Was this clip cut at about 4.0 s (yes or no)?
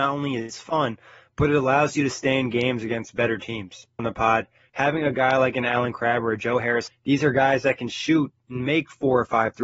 yes